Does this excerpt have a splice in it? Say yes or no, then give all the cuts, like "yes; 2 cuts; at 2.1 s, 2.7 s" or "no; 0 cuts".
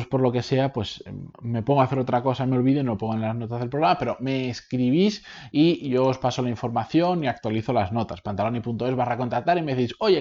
no; 0 cuts